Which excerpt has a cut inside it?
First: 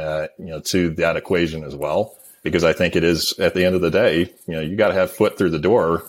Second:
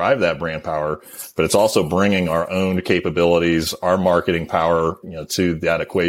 second; 1 cut; at 5.0 s

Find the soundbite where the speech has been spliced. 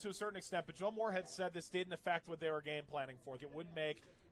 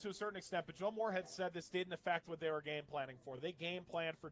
first; 1 cut; at 3.4 s

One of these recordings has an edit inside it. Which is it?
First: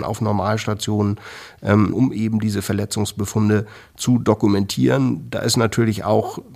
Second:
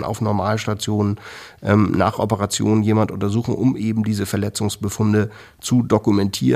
first; 1 cut; at 1.9 s

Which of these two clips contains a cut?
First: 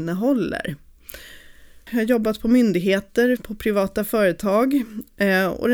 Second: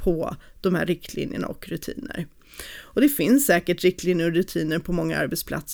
first; 2 cuts; at 1.9 s, 3.4 s

